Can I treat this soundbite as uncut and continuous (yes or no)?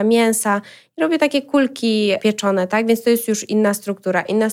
yes